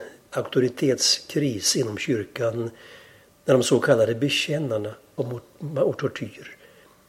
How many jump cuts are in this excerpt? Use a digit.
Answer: 1